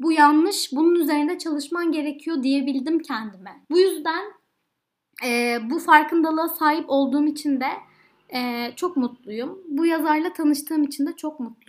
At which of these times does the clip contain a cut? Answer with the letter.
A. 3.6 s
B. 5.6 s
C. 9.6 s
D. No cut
A